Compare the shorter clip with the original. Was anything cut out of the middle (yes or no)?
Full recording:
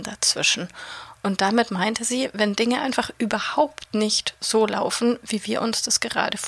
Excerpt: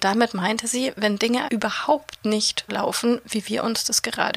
yes